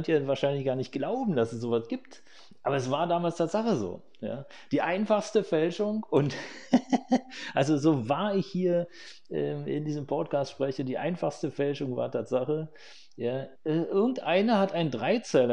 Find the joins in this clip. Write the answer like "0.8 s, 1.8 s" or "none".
13.6 s